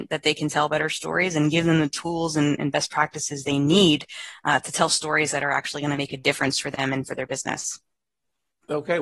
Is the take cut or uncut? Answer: uncut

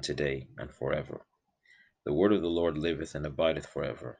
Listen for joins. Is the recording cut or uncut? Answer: uncut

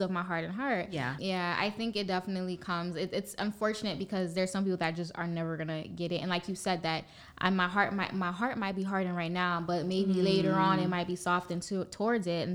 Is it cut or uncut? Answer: cut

